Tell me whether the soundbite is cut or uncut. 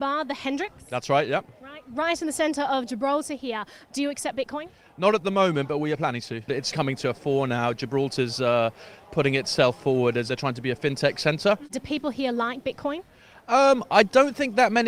cut